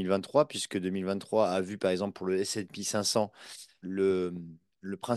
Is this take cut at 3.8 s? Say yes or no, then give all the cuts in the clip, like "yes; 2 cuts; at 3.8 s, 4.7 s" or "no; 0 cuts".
yes; 1 cut; at 3.8 s